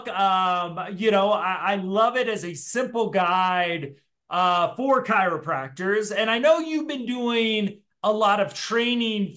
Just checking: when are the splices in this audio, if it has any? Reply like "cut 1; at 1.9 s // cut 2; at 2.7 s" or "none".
none